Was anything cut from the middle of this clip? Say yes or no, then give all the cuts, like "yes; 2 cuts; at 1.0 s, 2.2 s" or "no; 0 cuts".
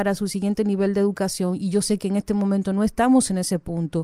no; 0 cuts